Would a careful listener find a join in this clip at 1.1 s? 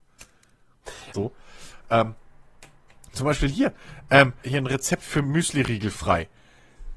yes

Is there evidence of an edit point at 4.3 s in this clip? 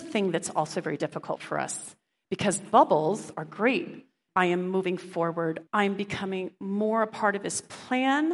yes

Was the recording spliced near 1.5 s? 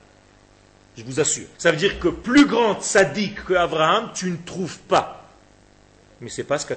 yes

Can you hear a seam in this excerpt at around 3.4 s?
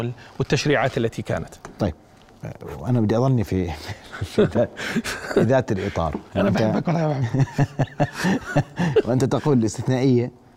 yes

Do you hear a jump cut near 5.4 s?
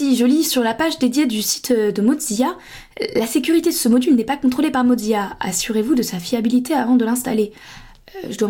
no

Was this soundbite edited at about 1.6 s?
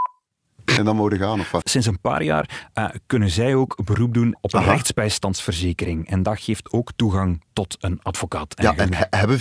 yes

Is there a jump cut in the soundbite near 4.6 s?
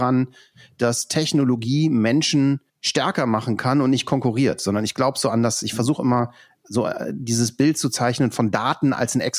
no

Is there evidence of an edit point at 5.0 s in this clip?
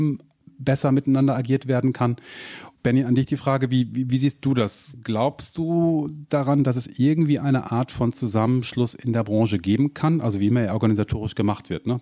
no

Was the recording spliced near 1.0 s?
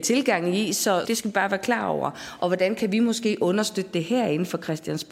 yes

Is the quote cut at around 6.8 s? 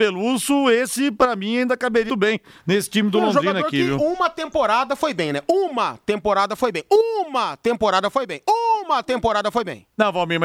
no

